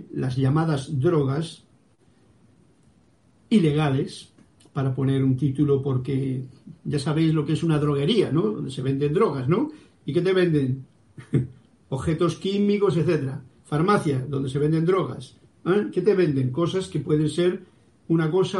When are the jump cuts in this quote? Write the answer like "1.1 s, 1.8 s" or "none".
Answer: none